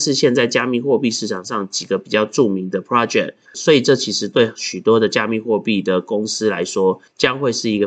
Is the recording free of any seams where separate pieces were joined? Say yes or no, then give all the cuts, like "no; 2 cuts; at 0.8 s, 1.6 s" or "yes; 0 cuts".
no; 1 cut; at 3.4 s